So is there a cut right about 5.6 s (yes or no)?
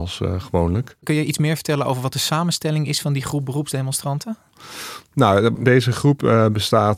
yes